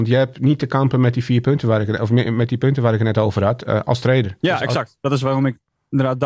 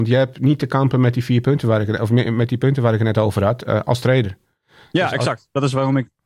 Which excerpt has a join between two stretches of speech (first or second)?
first